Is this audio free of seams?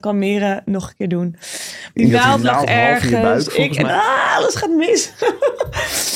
no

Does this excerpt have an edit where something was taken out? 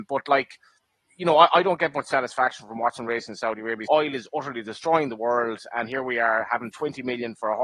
yes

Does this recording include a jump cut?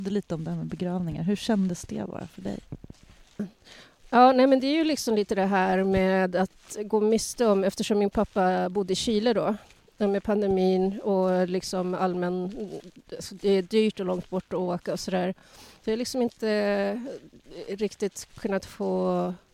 no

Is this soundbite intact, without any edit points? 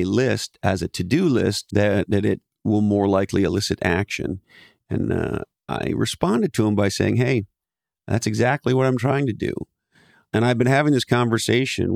no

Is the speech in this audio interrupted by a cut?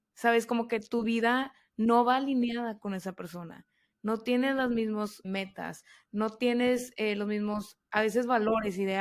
yes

